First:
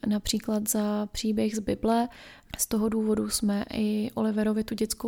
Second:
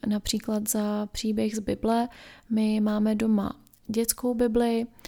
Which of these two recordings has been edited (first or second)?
first